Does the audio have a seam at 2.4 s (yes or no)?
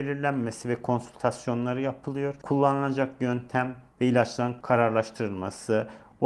no